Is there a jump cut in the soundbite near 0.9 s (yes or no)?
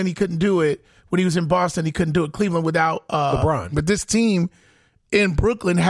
no